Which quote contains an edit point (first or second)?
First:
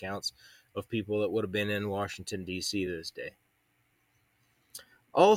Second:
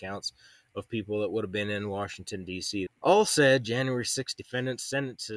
second